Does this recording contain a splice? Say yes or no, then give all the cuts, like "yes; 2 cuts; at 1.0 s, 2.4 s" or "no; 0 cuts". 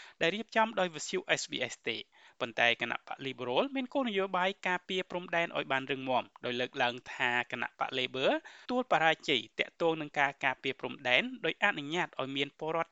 yes; 1 cut; at 8.6 s